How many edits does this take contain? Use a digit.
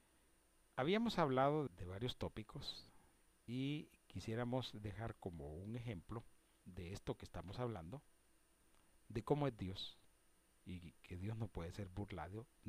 1